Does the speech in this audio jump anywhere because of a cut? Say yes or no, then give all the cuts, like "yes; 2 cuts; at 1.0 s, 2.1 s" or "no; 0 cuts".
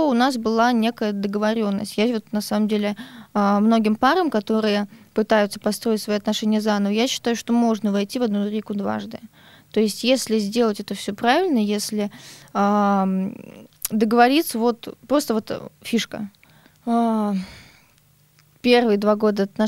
yes; 1 cut; at 16.6 s